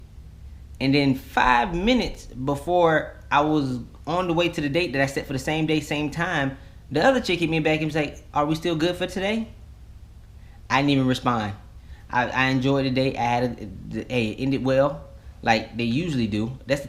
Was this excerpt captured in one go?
yes; 0 cuts

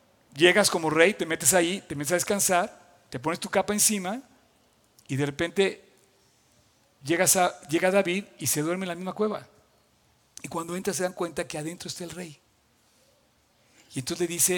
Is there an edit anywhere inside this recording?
no; 0 cuts

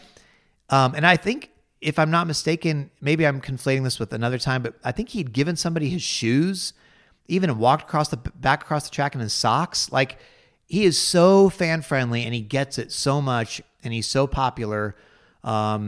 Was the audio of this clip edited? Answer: no; 0 cuts

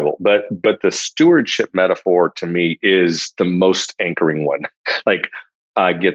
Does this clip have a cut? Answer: no; 0 cuts

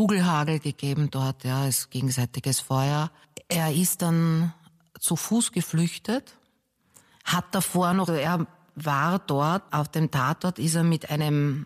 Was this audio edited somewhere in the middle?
yes; 2 cuts; at 8.1 s, 9.7 s

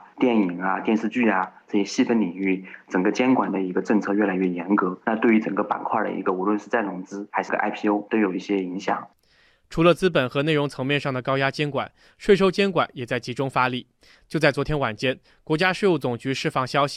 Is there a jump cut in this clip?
no; 0 cuts

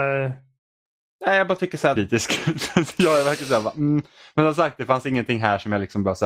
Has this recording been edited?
yes; 1 cut; at 2.0 s

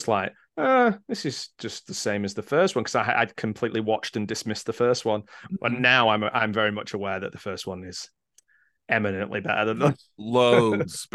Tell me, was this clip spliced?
no; 0 cuts

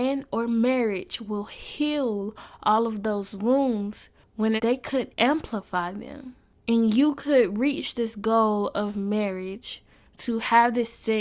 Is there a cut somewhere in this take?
yes; 1 cut; at 4.6 s

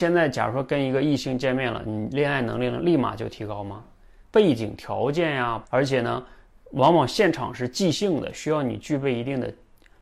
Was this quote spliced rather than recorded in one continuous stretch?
yes; 2 cuts; at 4.2 s, 5.6 s

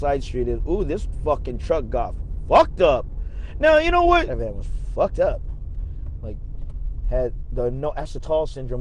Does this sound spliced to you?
yes; 1 cut; at 4.3 s

